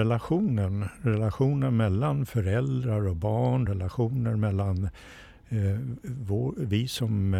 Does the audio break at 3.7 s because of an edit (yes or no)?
no